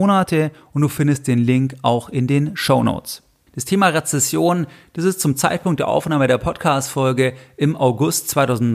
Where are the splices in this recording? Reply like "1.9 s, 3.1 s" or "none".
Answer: 3.5 s

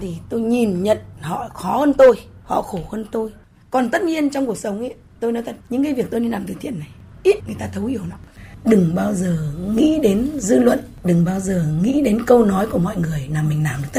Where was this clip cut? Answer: 7.4 s

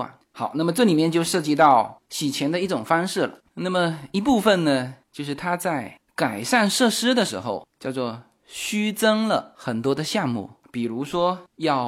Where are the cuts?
none

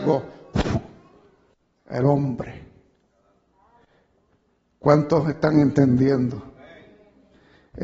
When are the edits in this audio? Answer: none

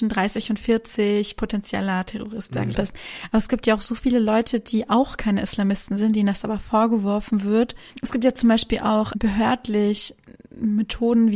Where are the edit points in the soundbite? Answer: 2.7 s

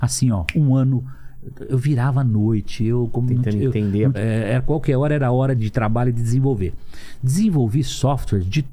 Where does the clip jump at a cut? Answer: 4.1 s, 5.6 s

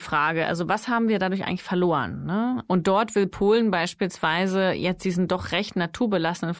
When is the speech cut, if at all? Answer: 2.7 s

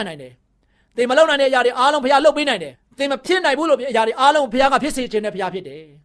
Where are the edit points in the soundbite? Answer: 2.7 s

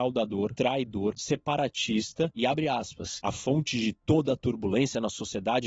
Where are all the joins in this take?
1.2 s

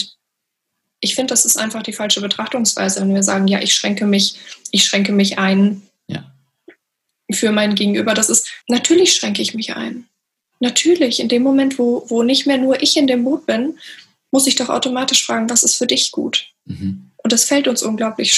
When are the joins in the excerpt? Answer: 8.6 s

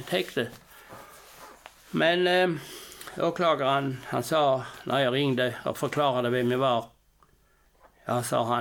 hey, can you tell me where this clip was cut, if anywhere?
none

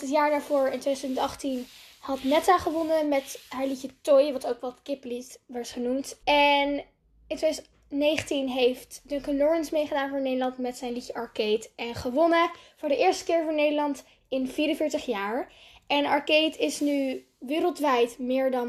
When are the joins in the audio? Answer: 6.2 s

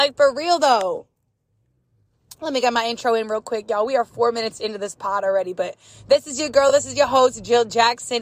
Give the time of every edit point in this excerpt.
none

